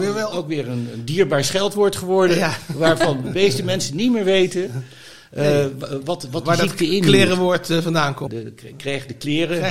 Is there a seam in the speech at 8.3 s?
yes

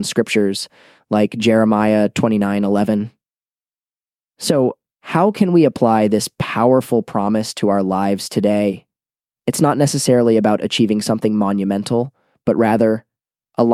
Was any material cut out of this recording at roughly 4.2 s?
no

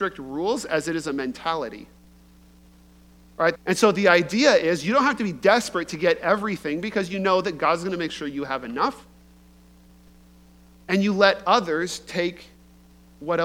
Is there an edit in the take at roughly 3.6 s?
yes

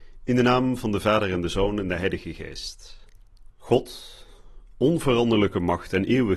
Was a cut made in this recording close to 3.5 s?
yes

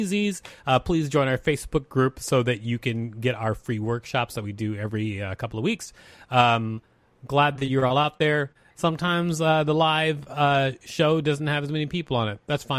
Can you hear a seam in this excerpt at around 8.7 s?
yes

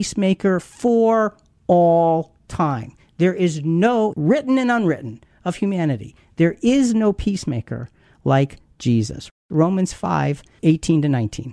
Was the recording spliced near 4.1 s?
yes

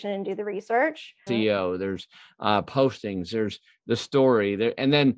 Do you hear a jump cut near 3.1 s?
no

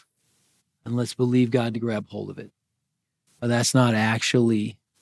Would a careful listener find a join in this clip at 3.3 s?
yes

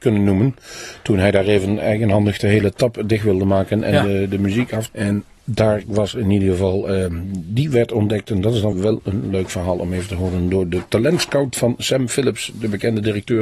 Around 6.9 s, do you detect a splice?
no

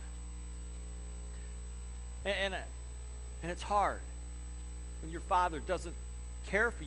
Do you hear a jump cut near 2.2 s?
yes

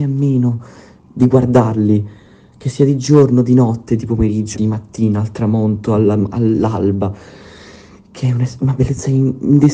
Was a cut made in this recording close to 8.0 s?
no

